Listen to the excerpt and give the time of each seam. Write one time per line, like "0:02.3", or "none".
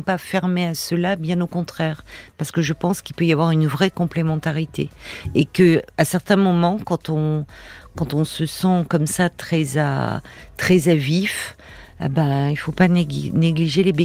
none